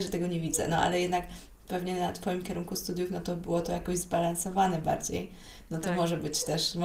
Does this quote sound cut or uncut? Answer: uncut